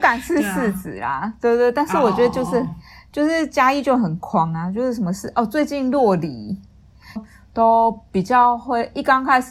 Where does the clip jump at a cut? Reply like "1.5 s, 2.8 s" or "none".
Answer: 7.2 s